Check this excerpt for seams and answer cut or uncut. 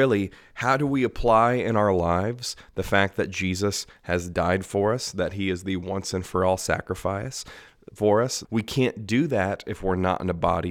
cut